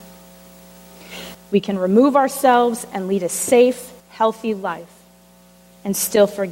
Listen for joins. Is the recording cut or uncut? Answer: cut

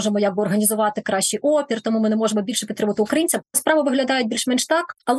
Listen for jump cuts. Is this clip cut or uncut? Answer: cut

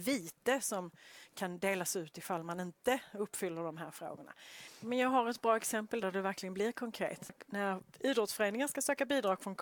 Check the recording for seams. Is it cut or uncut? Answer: cut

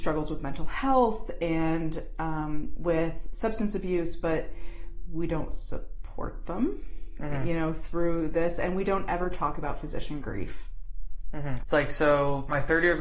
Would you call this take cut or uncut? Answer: cut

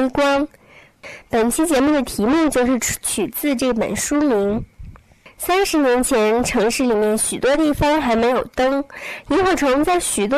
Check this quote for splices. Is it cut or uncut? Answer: uncut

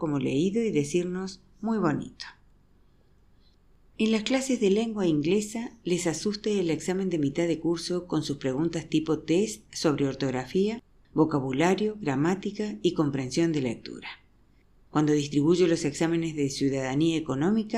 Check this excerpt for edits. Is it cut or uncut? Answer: uncut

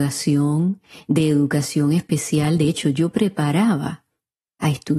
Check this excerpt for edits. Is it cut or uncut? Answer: uncut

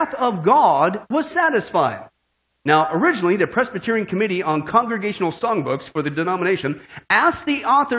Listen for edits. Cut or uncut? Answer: uncut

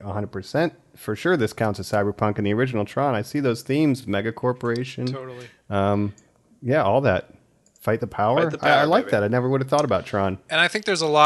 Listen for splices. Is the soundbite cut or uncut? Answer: uncut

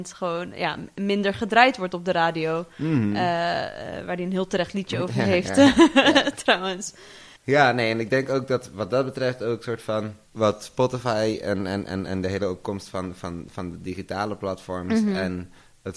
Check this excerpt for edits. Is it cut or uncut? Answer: uncut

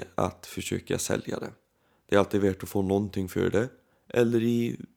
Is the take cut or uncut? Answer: uncut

